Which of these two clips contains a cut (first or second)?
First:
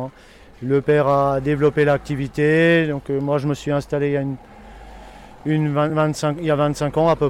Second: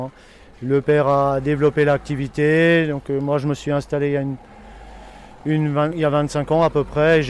second